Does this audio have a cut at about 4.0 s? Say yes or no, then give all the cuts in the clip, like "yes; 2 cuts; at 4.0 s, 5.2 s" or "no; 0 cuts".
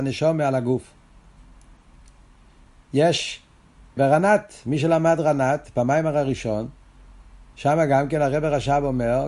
yes; 1 cut; at 4.0 s